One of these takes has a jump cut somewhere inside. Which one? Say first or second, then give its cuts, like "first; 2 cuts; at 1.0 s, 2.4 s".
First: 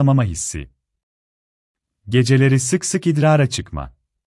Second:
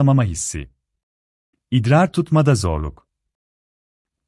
second; 1 cut; at 1.5 s